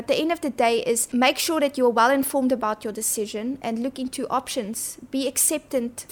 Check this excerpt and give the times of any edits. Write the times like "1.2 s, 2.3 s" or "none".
none